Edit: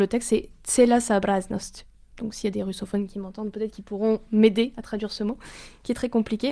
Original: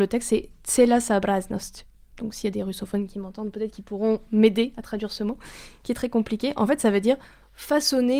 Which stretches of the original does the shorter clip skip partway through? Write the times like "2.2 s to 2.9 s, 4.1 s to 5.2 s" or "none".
none